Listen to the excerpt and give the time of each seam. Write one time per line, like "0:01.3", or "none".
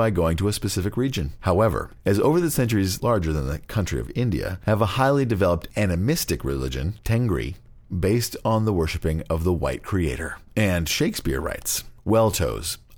0:01.4
0:03.0